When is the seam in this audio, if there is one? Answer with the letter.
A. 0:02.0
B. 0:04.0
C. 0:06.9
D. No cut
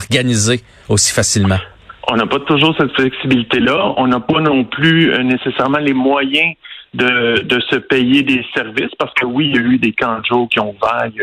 A